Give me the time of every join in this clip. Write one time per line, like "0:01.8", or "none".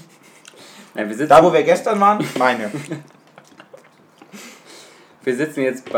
none